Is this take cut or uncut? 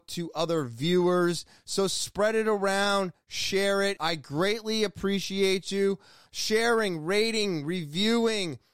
cut